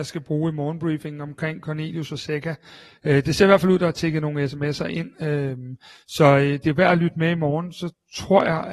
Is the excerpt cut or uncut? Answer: uncut